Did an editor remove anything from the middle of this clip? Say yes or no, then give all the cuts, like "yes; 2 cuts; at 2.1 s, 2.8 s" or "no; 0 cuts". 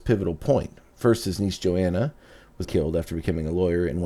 yes; 1 cut; at 2.6 s